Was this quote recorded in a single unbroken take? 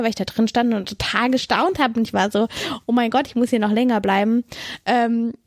yes; 0 cuts

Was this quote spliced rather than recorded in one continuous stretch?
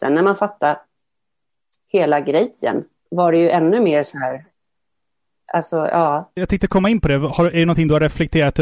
yes; 1 cut; at 3.1 s

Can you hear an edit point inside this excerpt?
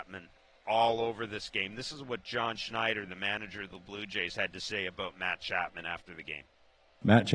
no; 0 cuts

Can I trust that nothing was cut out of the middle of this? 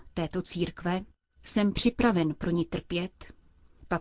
no; 1 cut; at 1.4 s

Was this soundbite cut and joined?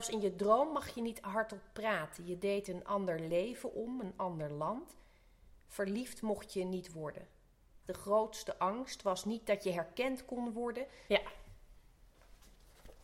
yes; 2 cuts; at 7.8 s, 11.1 s

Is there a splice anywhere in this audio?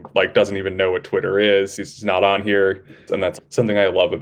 yes; 1 cut; at 3.1 s

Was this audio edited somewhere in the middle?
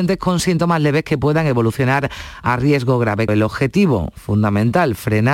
yes; 1 cut; at 3.3 s

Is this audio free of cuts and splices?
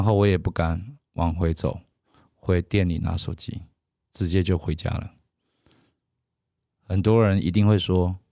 yes; 0 cuts

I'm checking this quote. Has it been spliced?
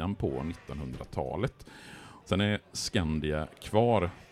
yes; 1 cut; at 2.2 s

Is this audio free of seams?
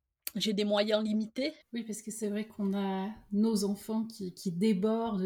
no; 1 cut; at 1.6 s

